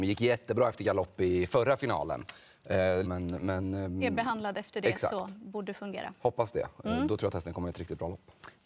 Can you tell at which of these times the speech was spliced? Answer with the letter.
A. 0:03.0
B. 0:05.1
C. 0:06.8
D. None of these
A